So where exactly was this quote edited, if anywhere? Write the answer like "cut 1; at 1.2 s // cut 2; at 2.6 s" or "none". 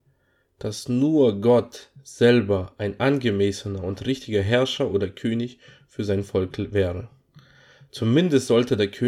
none